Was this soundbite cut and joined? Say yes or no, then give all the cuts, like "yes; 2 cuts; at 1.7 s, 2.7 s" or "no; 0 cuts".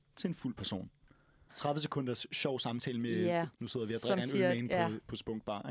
yes; 2 cuts; at 1.5 s, 3.5 s